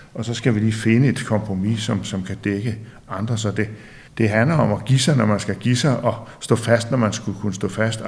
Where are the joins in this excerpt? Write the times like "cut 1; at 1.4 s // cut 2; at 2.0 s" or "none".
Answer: cut 1; at 4.1 s